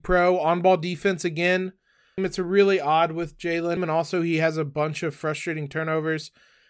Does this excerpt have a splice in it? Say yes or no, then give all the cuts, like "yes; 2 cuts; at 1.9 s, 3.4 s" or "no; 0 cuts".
yes; 2 cuts; at 2.2 s, 3.8 s